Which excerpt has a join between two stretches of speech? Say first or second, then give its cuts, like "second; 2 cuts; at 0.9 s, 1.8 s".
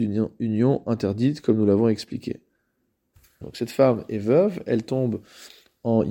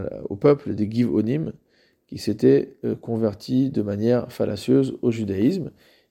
first; 1 cut; at 3.4 s